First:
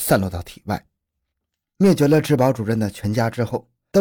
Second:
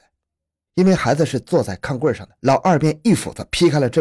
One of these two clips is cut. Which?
second; 1 cut; at 2.4 s

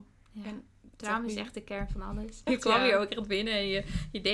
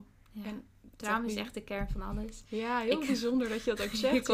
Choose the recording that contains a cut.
first; 1 cut; at 2.5 s

